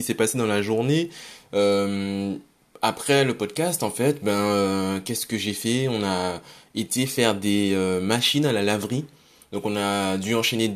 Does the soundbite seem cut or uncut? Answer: uncut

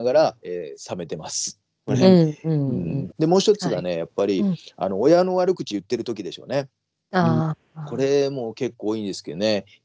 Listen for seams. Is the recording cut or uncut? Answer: cut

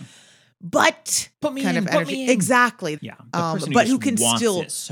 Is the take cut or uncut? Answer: cut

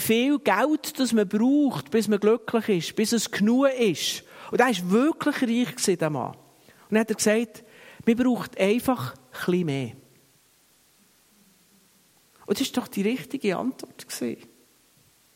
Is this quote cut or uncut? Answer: uncut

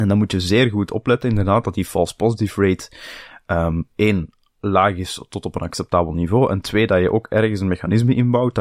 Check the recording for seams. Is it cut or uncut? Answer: uncut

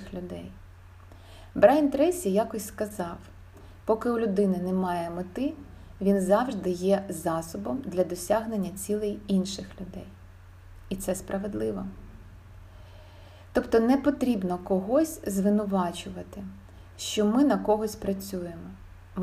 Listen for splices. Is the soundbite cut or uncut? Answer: uncut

